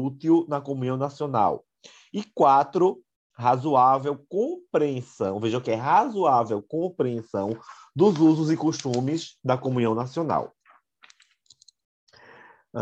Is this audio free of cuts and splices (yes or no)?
yes